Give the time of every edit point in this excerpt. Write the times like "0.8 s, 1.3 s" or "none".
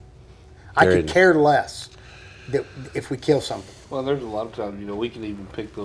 3.8 s